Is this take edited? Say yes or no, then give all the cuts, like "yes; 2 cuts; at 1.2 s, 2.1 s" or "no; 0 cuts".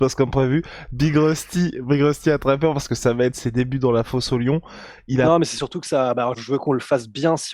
yes; 1 cut; at 6.3 s